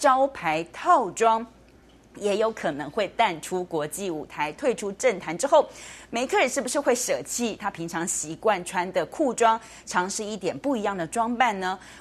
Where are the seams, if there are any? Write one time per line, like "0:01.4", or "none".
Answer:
none

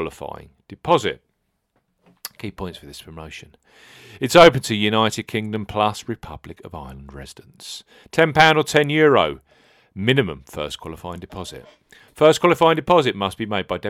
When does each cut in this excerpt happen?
none

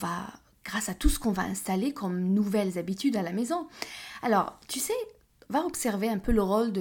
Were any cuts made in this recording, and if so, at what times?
0:05.5

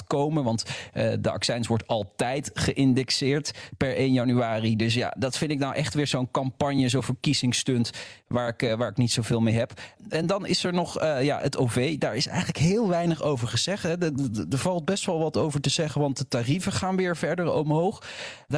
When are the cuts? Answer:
none

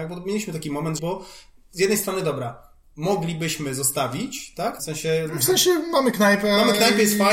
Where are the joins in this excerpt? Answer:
0:01.0
0:04.8

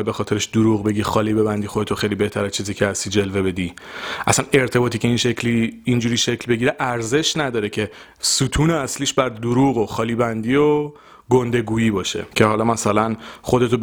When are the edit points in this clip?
0:12.3

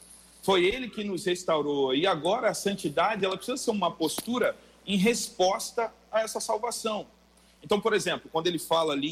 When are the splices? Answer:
none

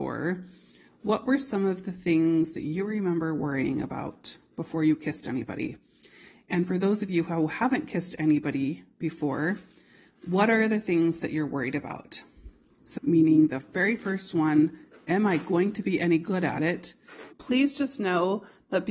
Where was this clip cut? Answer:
0:13.0
0:17.3

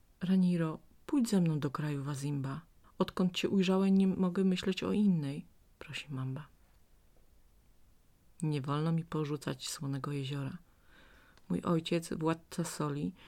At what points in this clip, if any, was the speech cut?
0:02.8

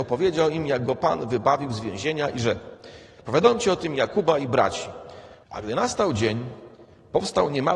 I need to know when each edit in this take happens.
0:05.4

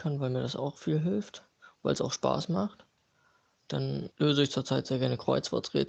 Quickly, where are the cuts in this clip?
none

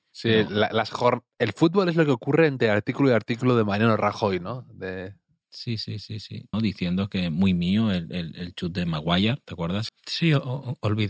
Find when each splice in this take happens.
0:06.5
0:09.9

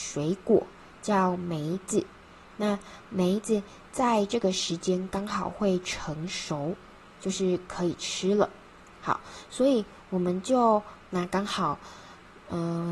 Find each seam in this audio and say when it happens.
0:11.0

